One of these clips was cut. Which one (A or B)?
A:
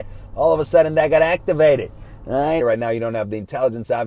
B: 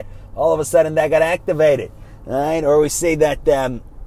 A